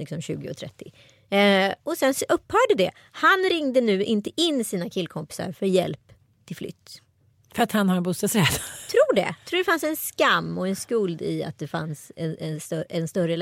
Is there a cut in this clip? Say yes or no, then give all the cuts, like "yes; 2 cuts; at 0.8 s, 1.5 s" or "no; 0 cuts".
no; 0 cuts